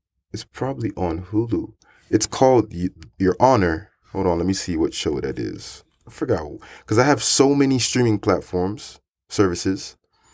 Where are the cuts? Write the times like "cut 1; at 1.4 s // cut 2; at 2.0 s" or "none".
cut 1; at 3.1 s